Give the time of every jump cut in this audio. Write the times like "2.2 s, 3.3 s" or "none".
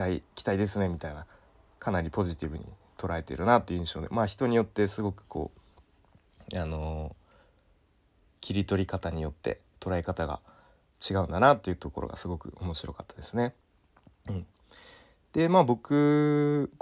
none